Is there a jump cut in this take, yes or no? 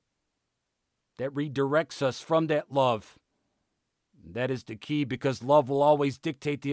no